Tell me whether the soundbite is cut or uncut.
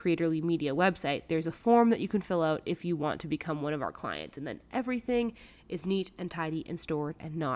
uncut